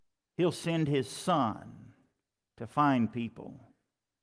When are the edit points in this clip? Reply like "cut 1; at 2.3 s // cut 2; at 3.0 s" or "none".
none

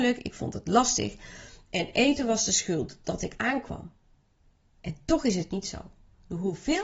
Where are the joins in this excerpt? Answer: cut 1; at 4.7 s

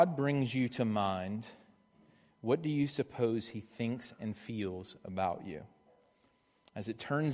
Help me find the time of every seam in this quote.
none

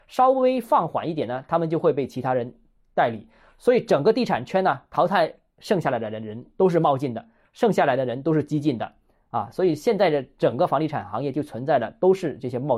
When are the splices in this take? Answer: none

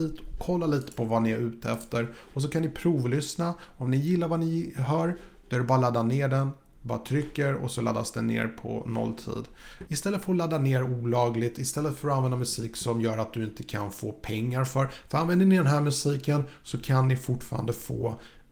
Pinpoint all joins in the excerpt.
cut 1; at 6.8 s // cut 2; at 9.9 s

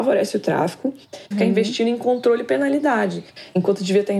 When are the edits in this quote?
cut 1; at 1.3 s

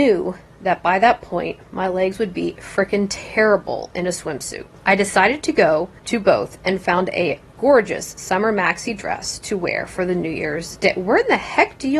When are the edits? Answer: cut 1; at 4.8 s // cut 2; at 6.0 s

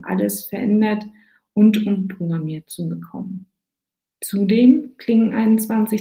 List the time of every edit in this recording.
none

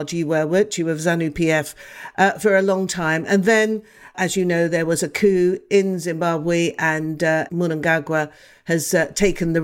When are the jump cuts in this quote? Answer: cut 1; at 4.1 s

